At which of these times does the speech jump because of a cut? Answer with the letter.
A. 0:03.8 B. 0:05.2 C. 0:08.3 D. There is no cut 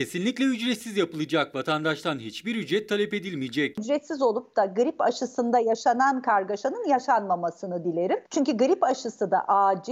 C